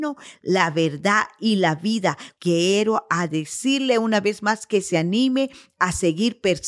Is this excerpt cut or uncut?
cut